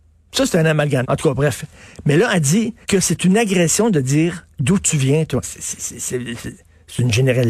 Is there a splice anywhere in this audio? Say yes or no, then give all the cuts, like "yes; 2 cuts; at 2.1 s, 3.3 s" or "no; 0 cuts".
yes; 3 cuts; at 1.0 s, 2.8 s, 5.4 s